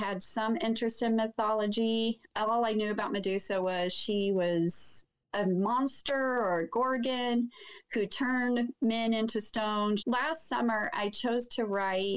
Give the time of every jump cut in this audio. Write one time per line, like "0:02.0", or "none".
0:10.0

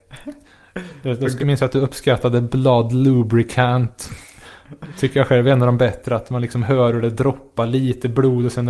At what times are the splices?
0:01.4

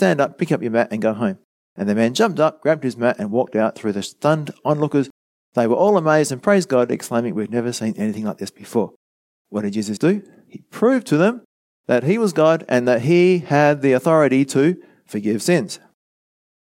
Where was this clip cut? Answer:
0:10.0

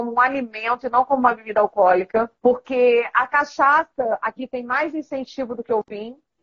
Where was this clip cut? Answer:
0:02.4

